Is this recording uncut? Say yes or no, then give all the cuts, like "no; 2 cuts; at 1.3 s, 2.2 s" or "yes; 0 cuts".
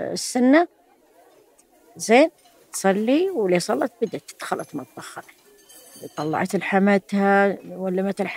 yes; 0 cuts